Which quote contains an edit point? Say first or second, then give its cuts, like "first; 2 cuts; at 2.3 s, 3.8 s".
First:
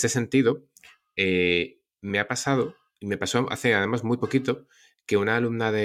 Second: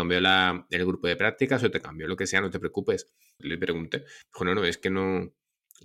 second; 1 cut; at 3.4 s